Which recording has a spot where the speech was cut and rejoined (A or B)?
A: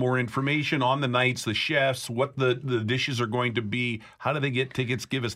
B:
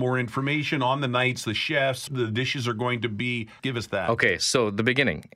B